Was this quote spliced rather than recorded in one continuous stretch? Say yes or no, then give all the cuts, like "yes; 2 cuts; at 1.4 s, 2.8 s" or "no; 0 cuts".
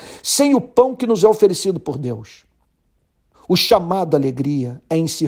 yes; 1 cut; at 3.3 s